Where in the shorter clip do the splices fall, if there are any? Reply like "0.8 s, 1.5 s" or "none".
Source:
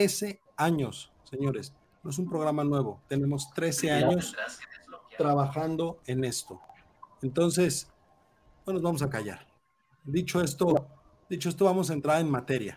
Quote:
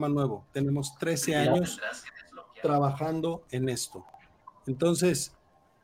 none